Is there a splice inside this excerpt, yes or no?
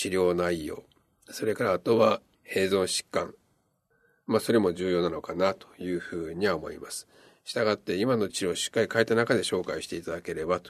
no